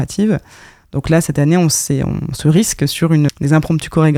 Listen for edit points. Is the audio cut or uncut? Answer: cut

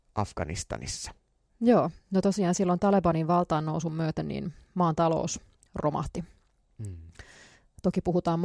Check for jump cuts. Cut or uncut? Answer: cut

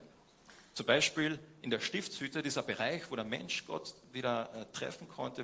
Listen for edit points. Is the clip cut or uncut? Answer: uncut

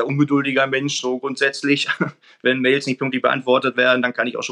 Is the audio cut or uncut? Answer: uncut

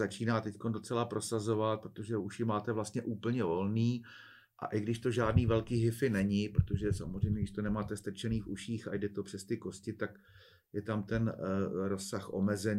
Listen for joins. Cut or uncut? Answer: uncut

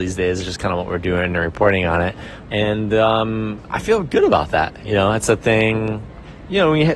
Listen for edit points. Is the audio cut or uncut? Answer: cut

